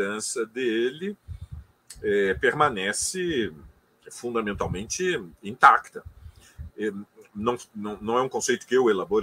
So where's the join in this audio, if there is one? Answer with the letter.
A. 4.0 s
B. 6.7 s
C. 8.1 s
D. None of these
B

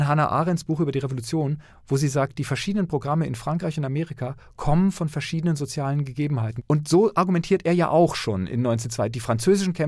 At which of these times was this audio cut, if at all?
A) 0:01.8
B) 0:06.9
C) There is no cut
C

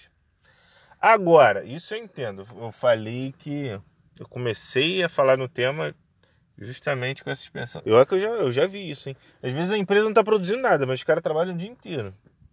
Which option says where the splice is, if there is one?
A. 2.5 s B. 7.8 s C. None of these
B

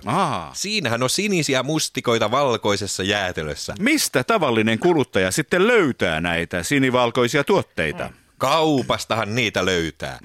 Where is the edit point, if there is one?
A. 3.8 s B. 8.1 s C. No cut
A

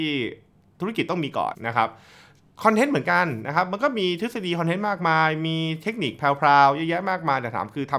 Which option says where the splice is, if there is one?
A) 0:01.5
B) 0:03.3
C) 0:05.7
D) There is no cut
A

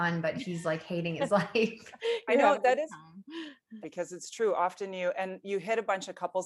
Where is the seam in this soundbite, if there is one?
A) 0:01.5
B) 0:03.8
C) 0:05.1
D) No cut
B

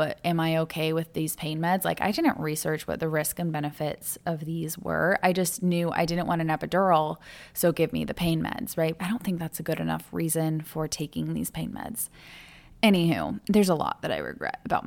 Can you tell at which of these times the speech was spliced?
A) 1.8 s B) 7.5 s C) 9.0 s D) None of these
C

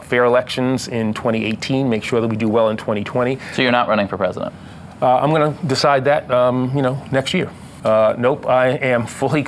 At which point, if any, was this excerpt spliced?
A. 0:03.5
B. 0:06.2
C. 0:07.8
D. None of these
C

